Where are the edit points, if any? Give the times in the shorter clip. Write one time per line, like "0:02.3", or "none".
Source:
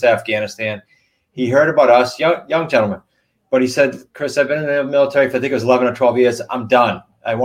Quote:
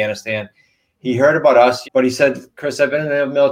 0:01.8